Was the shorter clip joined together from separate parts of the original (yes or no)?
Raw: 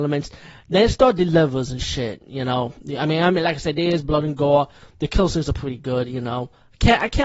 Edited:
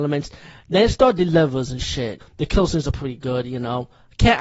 yes